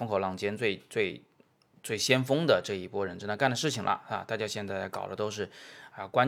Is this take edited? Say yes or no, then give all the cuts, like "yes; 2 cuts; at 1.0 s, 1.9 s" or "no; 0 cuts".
no; 0 cuts